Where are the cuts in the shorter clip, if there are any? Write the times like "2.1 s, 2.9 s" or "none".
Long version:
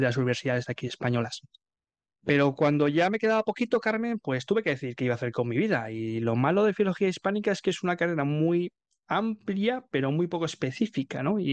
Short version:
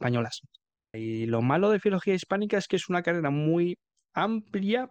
0.9 s